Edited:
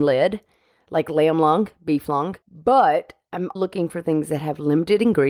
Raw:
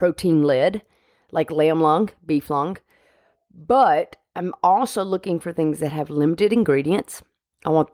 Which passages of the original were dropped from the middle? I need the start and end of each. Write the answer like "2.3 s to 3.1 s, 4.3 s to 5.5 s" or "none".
2.8 s to 3.4 s, 4.6 s to 5.1 s